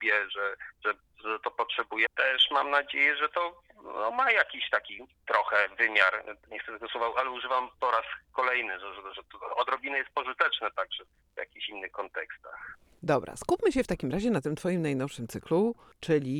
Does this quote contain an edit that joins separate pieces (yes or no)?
yes